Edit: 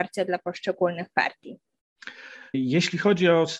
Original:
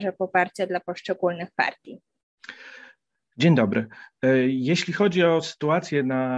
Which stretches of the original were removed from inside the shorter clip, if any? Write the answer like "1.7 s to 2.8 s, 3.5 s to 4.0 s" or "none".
3.0 s to 4.5 s